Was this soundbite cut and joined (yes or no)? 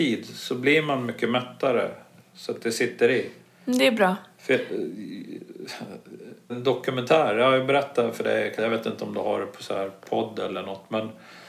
yes